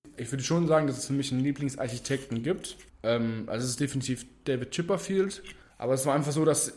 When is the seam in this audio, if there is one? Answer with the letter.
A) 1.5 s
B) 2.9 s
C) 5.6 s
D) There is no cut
C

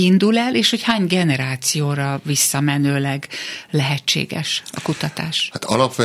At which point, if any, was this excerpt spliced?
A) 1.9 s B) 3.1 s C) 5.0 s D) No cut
D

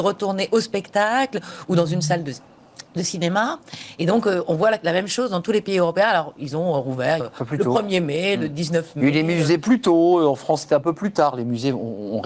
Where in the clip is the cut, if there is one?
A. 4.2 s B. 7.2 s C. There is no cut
B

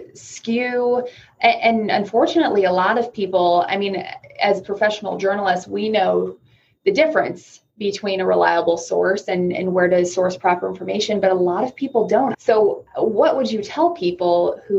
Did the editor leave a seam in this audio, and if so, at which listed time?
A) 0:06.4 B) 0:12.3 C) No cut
B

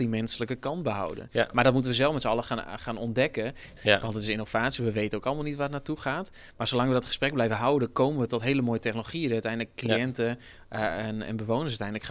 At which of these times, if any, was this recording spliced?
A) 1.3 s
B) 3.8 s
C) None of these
B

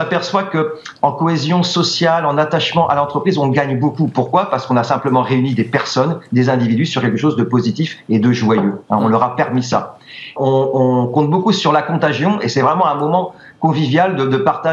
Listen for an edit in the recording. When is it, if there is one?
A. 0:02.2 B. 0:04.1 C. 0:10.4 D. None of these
C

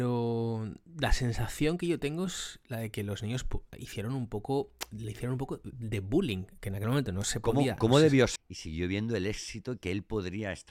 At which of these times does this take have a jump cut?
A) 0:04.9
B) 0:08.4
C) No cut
B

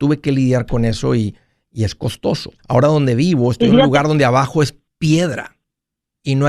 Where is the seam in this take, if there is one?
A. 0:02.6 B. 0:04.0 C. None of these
A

